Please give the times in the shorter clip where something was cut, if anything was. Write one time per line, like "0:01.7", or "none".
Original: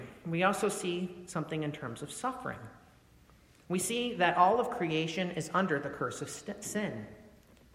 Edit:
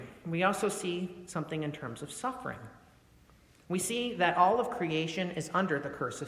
none